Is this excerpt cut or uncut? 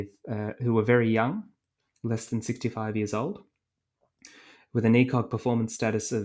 uncut